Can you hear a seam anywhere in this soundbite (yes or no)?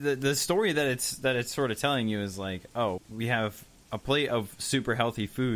yes